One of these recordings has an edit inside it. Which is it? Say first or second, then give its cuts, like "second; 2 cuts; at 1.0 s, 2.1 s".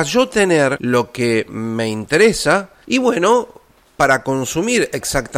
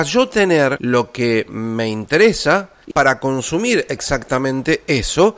second; 1 cut; at 2.9 s